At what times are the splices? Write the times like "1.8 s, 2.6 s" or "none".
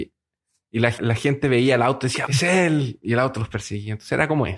1.0 s, 2.3 s